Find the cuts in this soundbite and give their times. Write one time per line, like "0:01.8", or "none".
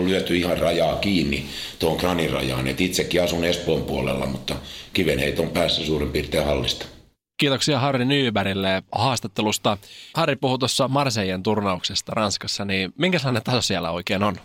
0:10.1

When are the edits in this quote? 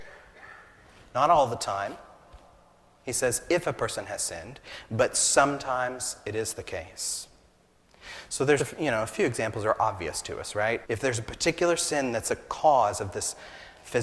0:08.6
0:10.8

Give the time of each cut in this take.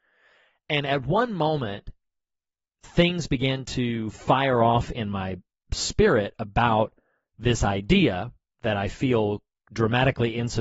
none

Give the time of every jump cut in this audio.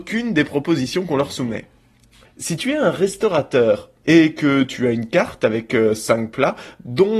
0:02.2

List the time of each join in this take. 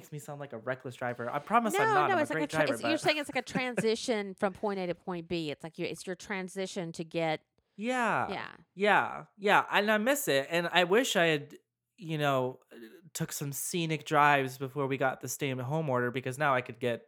none

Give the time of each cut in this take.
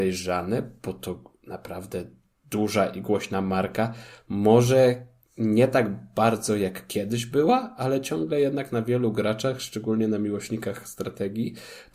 none

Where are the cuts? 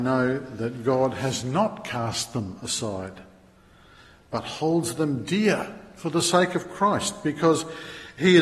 none

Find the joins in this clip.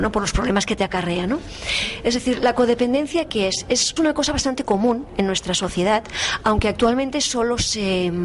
0:04.0

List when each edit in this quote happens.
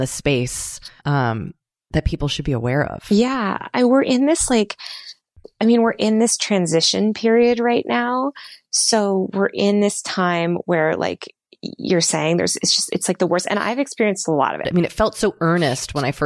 0:01.0
0:14.6

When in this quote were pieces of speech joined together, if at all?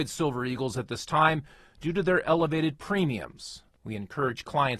none

